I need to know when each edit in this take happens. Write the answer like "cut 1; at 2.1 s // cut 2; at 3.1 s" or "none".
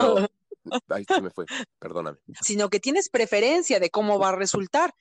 cut 1; at 2.4 s

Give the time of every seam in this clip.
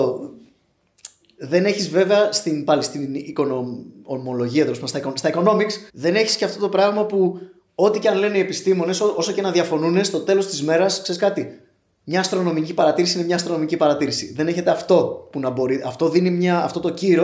cut 1; at 5.9 s

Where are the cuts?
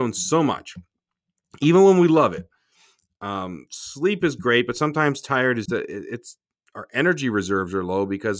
cut 1; at 5.7 s

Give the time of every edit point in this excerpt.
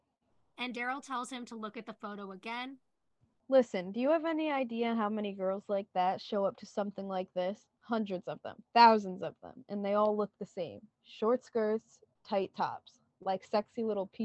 none

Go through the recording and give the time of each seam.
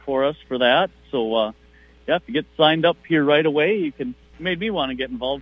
cut 1; at 4.3 s

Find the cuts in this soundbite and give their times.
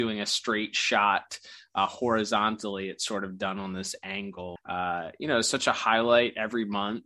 cut 1; at 4.6 s

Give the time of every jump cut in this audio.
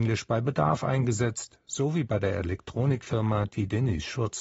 none

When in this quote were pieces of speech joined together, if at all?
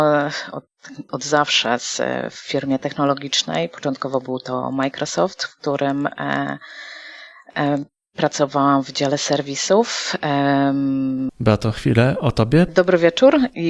cut 1; at 1.1 s // cut 2; at 11.3 s // cut 3; at 12.7 s

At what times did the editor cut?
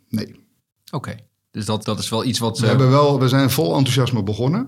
cut 1; at 1.8 s

